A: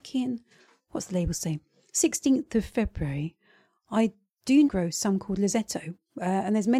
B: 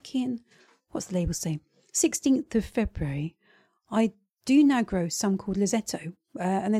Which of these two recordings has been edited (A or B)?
A